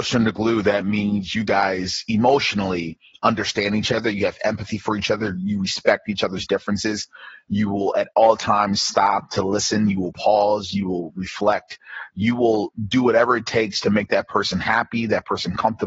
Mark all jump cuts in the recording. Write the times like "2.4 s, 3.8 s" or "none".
none